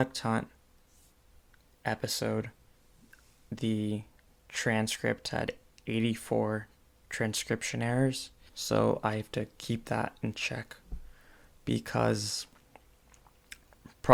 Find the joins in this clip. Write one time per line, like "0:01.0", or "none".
0:08.5